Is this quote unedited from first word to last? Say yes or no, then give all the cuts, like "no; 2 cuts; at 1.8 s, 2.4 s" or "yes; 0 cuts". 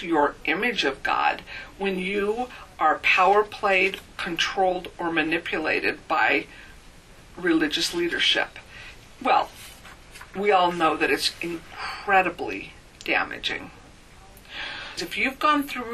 no; 1 cut; at 15.0 s